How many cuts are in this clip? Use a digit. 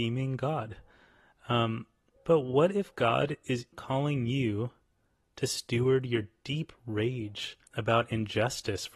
3